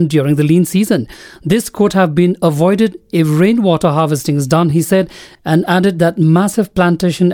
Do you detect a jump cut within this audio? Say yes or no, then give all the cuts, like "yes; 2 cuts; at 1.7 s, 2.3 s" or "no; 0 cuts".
no; 0 cuts